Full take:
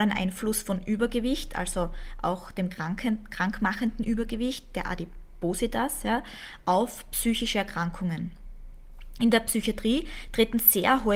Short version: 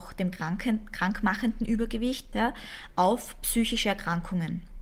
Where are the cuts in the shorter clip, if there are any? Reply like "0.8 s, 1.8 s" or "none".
2.3 s